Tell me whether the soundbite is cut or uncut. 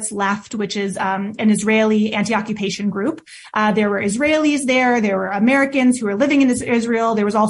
uncut